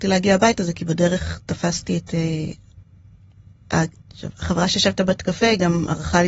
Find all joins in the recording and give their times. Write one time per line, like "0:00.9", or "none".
0:03.9